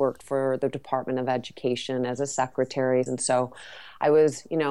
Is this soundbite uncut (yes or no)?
no